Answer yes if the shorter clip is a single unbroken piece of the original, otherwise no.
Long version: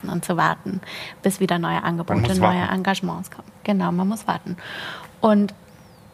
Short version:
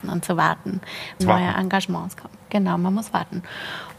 no